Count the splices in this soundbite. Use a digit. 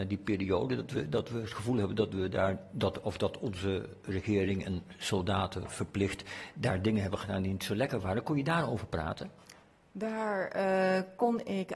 0